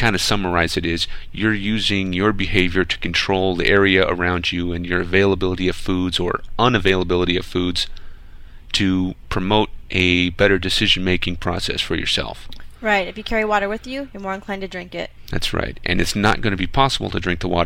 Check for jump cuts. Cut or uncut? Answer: uncut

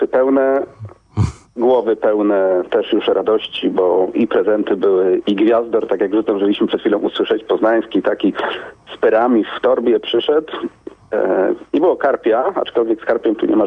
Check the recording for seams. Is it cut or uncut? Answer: cut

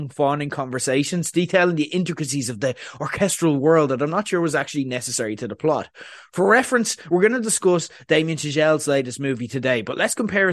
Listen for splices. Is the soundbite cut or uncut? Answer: uncut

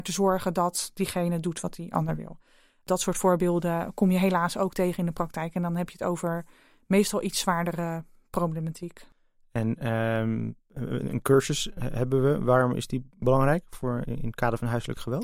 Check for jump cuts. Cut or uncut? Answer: uncut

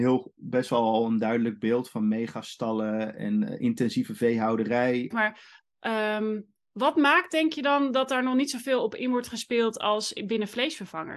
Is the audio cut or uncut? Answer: cut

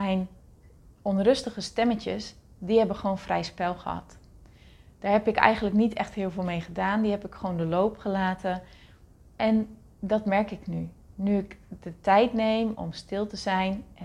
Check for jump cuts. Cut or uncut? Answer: uncut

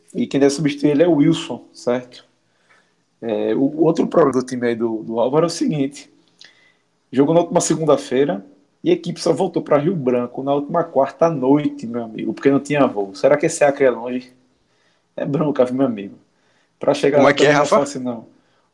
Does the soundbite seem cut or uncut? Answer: cut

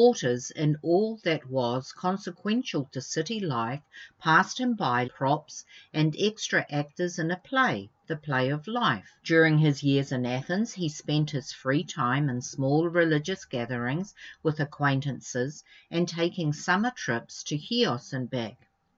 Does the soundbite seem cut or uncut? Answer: cut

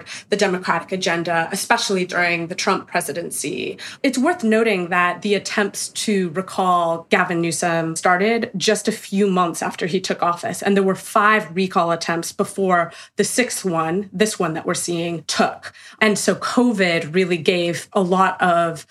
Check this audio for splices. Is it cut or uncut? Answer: uncut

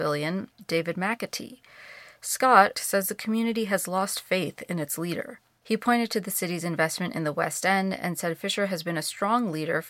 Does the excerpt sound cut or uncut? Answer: cut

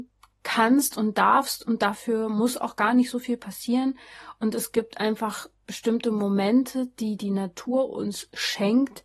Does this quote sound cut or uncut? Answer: uncut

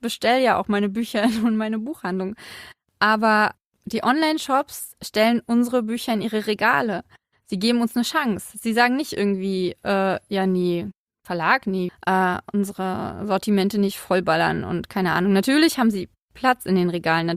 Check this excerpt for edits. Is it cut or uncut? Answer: cut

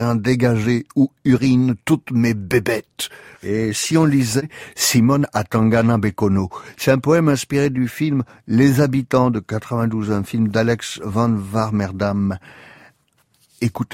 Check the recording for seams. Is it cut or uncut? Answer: cut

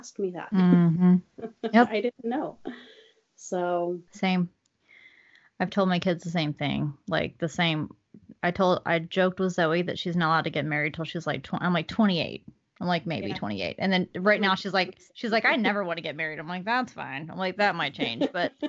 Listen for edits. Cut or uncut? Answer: cut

